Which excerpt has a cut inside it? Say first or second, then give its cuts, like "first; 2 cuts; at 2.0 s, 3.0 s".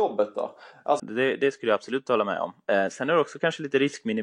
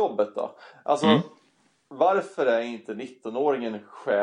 first; 1 cut; at 1.0 s